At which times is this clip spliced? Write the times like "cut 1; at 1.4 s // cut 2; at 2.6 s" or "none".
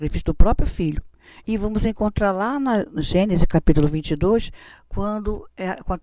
cut 1; at 1.4 s